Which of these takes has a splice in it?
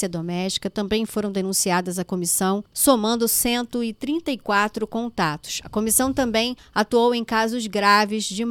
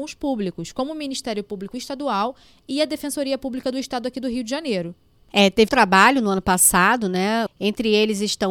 second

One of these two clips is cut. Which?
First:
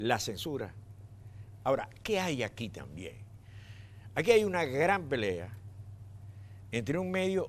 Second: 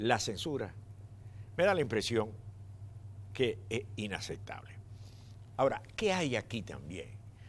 first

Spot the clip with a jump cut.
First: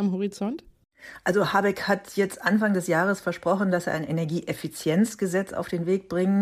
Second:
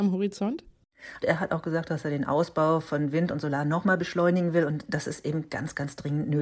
second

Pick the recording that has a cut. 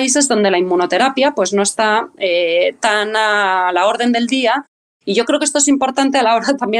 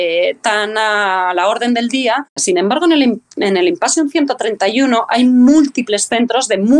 second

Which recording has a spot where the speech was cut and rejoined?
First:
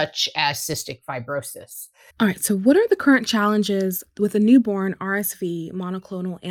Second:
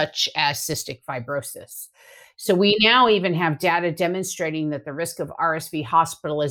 first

